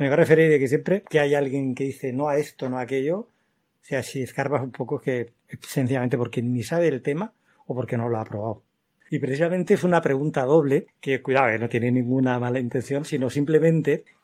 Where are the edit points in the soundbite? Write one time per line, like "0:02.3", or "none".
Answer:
0:09.0